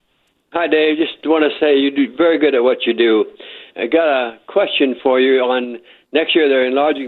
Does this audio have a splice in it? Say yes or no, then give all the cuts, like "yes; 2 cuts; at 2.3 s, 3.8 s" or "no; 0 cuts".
yes; 1 cut; at 3.7 s